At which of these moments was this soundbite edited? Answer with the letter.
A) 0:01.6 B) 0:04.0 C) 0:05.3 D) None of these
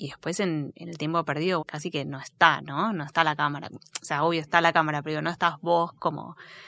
A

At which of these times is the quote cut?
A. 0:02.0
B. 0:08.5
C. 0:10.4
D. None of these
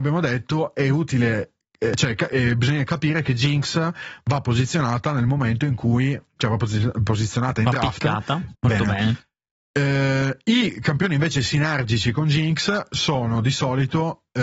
B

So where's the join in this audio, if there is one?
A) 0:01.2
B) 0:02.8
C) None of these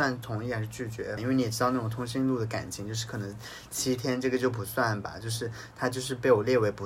A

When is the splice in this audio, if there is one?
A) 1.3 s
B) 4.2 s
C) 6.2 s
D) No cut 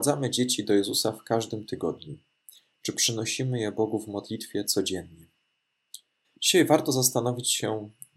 C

